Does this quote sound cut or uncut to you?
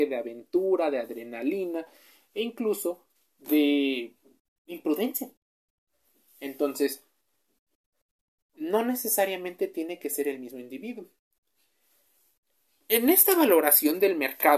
uncut